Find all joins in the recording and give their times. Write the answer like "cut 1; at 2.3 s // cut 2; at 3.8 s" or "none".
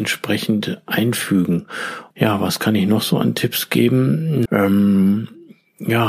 cut 1; at 2.1 s // cut 2; at 4.5 s

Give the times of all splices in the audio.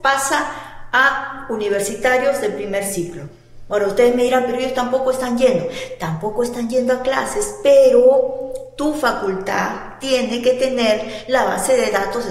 none

